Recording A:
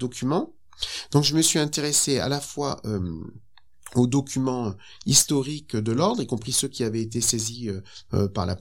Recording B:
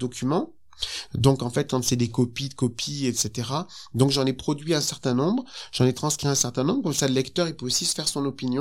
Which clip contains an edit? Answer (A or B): B